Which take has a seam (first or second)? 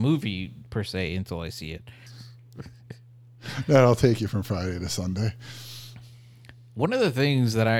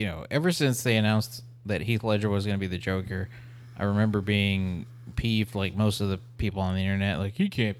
first